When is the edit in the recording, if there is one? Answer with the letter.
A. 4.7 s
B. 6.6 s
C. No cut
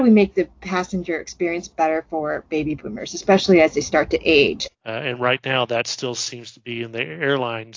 A